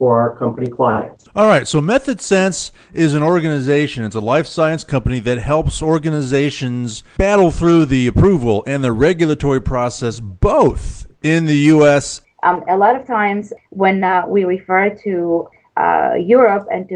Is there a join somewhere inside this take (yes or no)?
yes